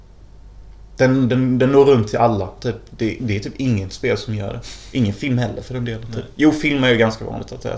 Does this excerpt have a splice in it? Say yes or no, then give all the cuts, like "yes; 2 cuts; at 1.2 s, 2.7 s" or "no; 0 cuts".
no; 0 cuts